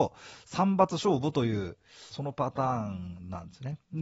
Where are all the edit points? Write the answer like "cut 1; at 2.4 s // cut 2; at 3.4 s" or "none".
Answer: cut 1; at 2.1 s

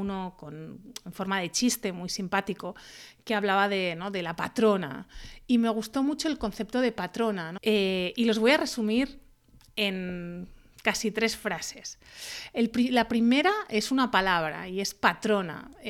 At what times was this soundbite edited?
cut 1; at 7.6 s

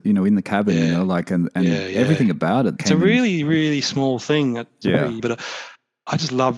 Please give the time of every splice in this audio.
cut 1; at 2.8 s // cut 2; at 5.2 s

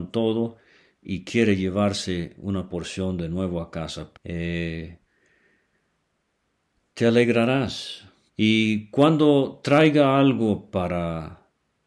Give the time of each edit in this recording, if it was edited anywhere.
cut 1; at 4.1 s // cut 2; at 8.3 s

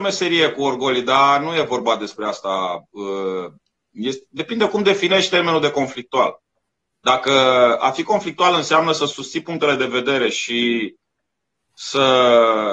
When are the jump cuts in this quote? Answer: none

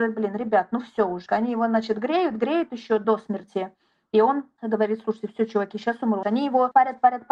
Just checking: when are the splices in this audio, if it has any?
cut 1; at 1.3 s // cut 2; at 6.2 s

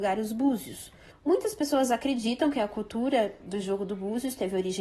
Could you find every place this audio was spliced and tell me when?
cut 1; at 1.1 s

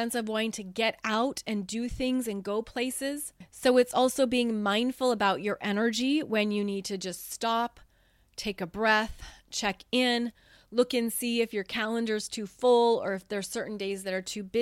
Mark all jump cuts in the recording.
none

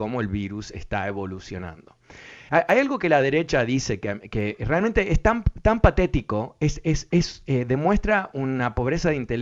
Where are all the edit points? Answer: cut 1; at 2.5 s

